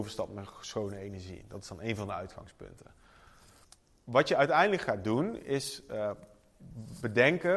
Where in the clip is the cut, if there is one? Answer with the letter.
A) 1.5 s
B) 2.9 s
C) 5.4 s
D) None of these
D